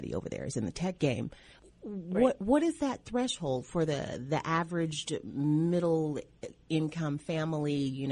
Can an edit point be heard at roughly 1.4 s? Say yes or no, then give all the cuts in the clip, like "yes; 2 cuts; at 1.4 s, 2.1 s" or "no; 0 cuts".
no; 0 cuts